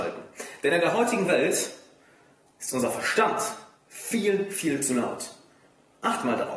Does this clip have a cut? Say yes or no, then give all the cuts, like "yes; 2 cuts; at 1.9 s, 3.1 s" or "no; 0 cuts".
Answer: no; 0 cuts